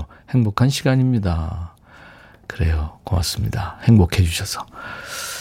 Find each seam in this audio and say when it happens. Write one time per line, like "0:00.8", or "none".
none